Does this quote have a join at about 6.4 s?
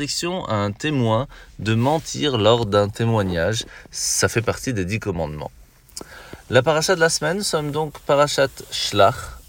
no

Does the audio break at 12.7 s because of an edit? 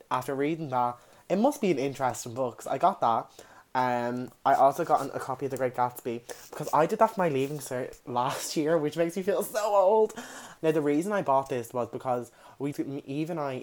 yes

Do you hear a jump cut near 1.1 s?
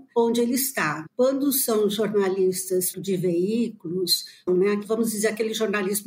no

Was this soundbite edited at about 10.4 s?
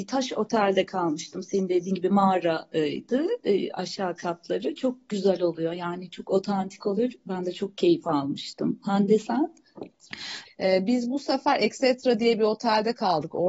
yes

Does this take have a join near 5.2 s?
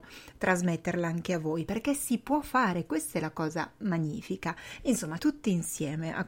yes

